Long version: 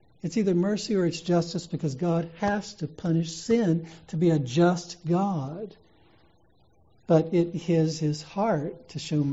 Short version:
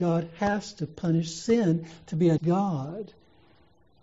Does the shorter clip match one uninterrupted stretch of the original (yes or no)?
no